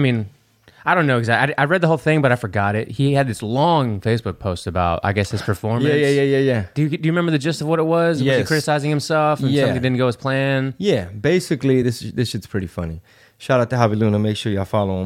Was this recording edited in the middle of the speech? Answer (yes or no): no